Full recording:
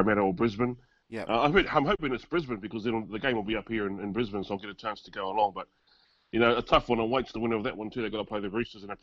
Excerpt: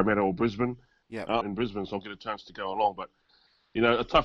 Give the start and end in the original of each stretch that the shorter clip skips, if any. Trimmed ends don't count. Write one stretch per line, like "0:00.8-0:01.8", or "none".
0:01.4-0:04.0